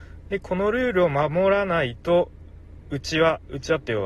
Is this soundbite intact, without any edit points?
yes; 0 cuts

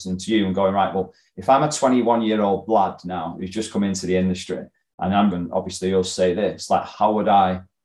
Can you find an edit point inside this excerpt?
yes; 1 cut; at 5.3 s

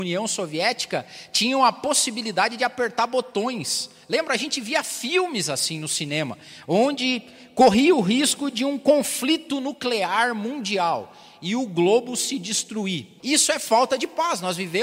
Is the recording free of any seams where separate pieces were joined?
no; 1 cut; at 13.2 s

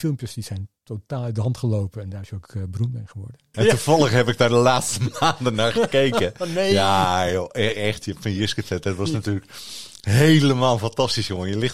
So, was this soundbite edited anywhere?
yes; 1 cut; at 3.5 s

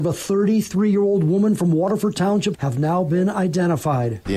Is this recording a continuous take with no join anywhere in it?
no; 1 cut; at 2.5 s

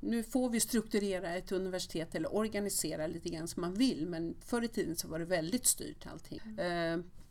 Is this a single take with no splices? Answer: no; 1 cut; at 6.4 s

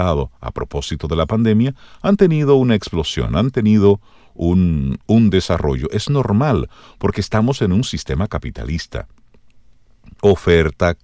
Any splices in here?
no; 0 cuts

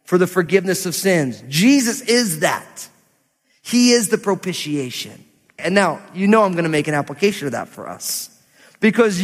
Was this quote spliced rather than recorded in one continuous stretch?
yes; 1 cut; at 5.6 s

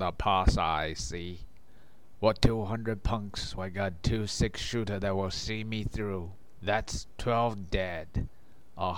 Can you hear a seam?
yes; 1 cut; at 3.6 s

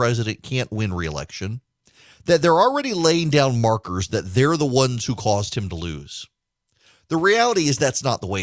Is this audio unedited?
yes; 0 cuts

